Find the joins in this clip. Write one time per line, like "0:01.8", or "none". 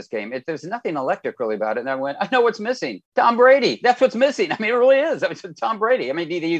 0:03.1